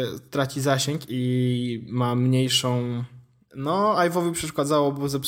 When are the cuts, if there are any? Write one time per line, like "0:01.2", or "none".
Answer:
0:03.5

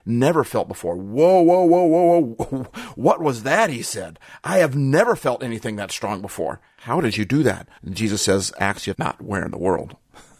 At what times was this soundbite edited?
0:07.8
0:08.9

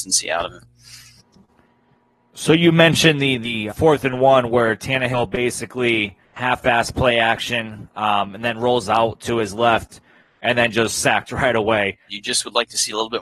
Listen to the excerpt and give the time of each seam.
0:03.7
0:06.2
0:12.1

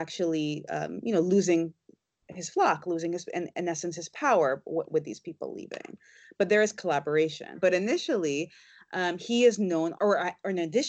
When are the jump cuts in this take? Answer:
0:07.5
0:09.9

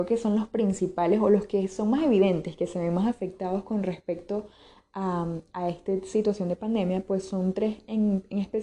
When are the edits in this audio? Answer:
none

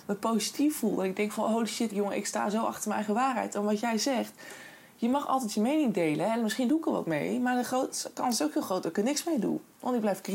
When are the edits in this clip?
0:01.9

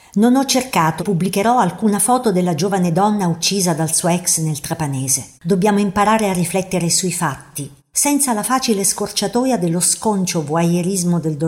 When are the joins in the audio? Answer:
0:01.0
0:05.4
0:07.8

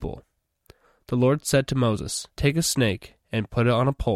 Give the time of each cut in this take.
0:02.3

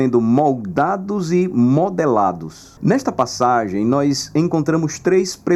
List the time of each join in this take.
0:02.8

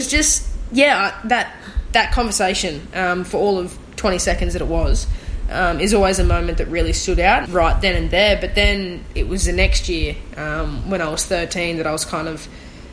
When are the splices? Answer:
0:07.4

